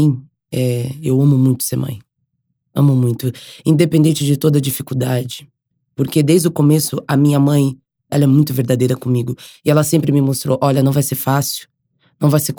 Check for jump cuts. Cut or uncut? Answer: cut